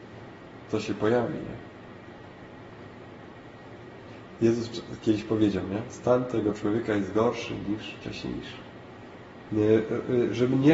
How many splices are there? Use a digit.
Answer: 1